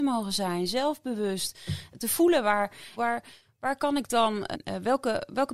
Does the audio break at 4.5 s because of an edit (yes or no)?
yes